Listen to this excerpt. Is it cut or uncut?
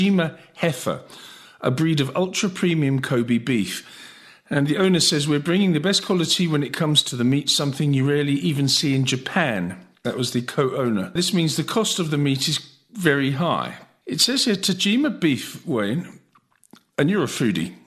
cut